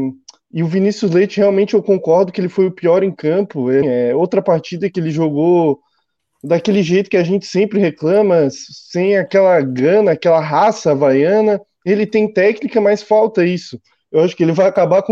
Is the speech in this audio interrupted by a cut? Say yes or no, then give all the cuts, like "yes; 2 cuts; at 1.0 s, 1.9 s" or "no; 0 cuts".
yes; 1 cut; at 3.8 s